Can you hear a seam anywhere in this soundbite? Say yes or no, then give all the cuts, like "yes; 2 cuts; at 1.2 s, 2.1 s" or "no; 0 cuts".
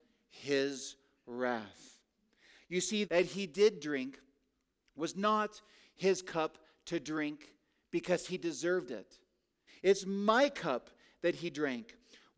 yes; 2 cuts; at 3.0 s, 9.7 s